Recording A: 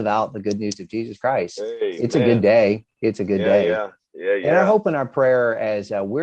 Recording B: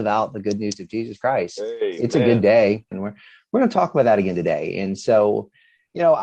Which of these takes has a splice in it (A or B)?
B